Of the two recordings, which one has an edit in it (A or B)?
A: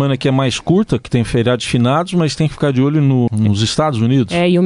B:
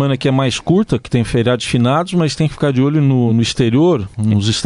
A